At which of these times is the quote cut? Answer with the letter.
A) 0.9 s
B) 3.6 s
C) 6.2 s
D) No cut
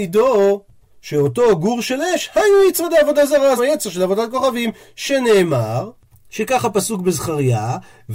B